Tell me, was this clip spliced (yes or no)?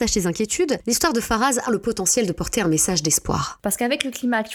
yes